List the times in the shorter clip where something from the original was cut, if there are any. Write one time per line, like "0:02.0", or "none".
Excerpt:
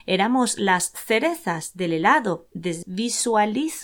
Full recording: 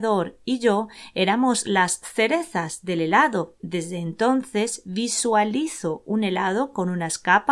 0:02.8